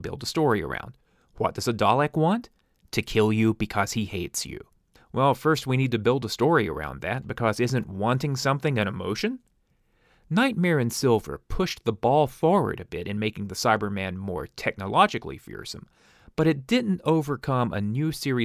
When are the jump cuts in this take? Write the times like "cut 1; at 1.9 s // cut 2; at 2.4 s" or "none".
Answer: cut 1; at 5.0 s